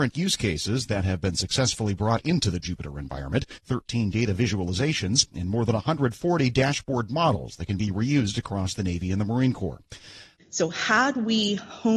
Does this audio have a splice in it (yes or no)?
yes